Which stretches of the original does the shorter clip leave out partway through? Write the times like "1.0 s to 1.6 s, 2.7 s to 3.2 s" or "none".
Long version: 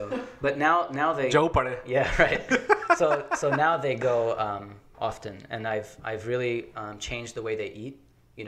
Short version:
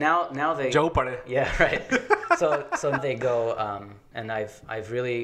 3.6 s to 3.8 s, 4.9 s to 5.5 s